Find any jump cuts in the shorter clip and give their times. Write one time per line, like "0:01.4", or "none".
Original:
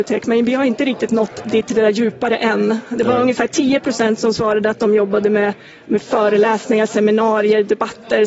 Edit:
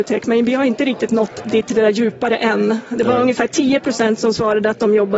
none